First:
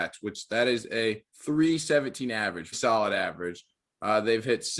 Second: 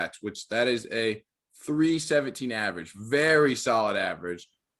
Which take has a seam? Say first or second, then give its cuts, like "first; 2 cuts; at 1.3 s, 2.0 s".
first; 2 cuts; at 1.3 s, 2.7 s